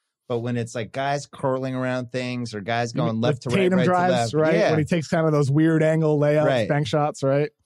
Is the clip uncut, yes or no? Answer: yes